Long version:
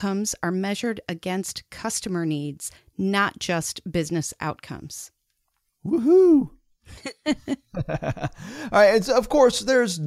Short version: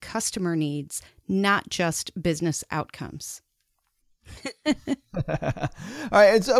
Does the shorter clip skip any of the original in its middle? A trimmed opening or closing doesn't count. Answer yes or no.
yes